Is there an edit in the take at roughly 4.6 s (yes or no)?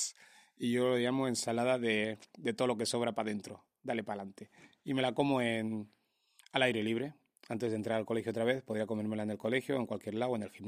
no